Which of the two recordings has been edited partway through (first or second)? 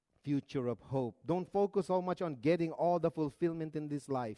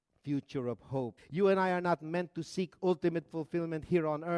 second